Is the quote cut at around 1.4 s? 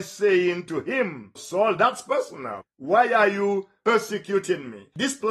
yes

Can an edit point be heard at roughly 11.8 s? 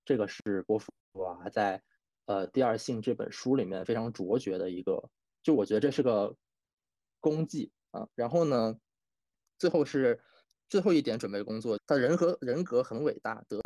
yes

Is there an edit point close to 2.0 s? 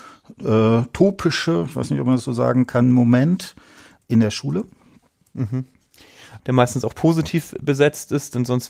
no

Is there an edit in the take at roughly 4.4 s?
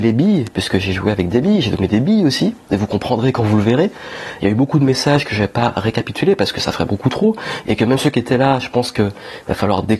yes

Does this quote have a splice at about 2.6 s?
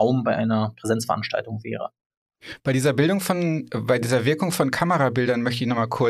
no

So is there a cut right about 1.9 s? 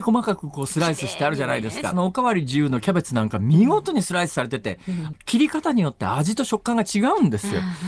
yes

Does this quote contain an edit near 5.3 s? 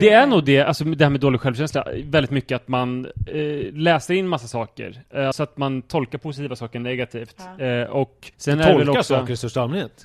yes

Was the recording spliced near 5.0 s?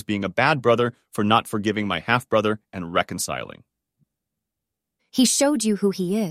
yes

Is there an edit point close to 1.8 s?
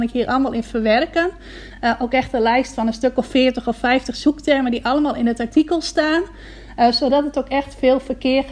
no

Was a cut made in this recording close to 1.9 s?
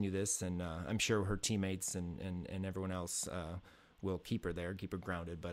no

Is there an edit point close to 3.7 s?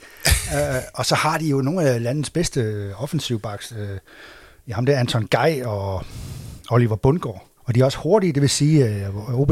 no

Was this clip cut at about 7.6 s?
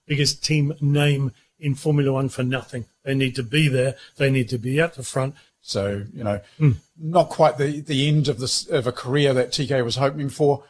no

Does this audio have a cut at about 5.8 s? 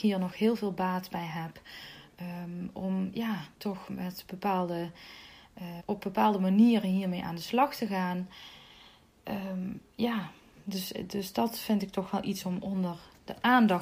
yes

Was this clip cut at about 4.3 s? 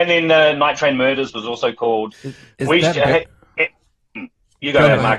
no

